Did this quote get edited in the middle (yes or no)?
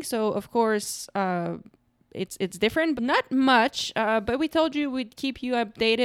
yes